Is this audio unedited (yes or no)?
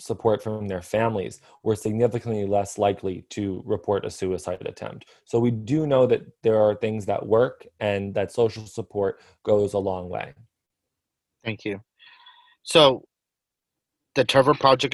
yes